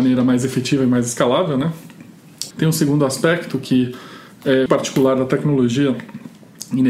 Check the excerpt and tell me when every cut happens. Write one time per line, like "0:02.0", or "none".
0:02.5
0:04.7